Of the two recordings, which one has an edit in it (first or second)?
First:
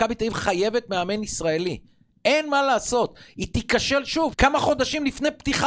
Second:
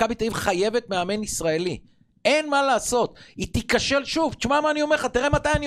first